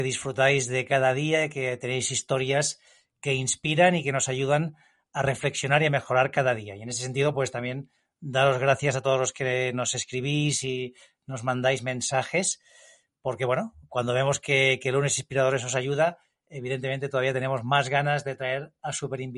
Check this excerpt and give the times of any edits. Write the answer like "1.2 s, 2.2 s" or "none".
none

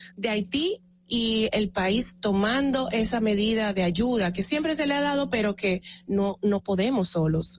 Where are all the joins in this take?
none

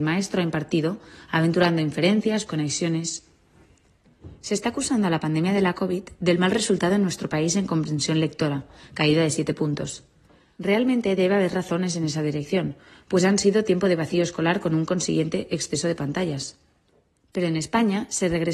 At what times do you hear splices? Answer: 2.5 s

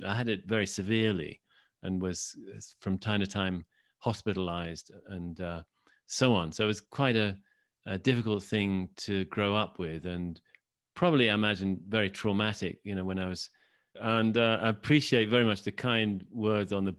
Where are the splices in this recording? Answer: 13.9 s

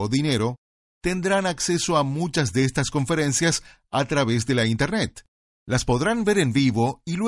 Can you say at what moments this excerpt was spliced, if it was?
none

